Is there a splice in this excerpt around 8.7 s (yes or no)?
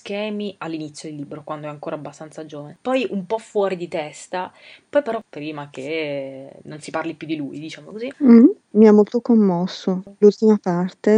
yes